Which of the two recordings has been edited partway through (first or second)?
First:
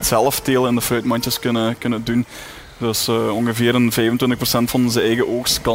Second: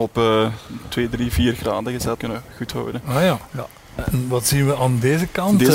second